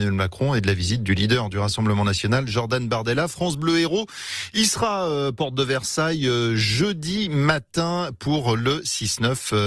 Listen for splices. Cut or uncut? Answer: uncut